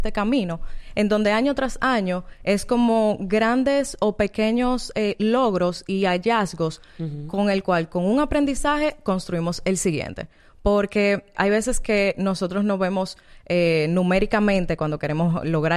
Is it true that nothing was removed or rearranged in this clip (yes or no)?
no